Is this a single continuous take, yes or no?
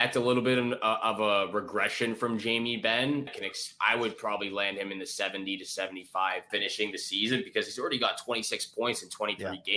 no